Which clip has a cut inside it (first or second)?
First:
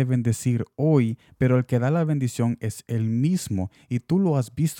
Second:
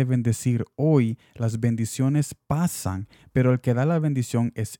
first